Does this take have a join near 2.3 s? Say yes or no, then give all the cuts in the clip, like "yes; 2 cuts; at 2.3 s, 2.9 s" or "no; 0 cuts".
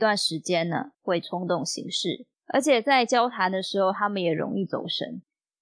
yes; 2 cuts; at 0.9 s, 2.3 s